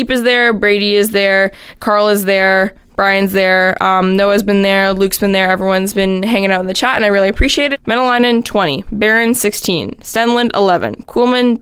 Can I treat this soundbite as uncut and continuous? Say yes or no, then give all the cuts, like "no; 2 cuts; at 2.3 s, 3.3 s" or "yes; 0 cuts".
no; 1 cut; at 7.7 s